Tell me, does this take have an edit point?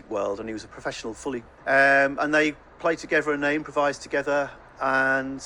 yes; 1 cut; at 1.6 s

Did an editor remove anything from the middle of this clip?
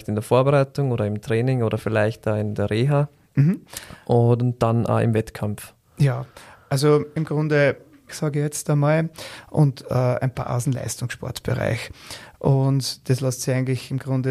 yes; 1 cut; at 8.1 s

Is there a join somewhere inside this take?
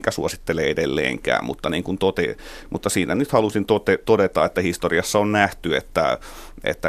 no; 0 cuts

